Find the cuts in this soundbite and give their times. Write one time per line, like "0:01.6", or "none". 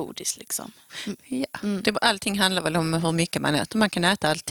none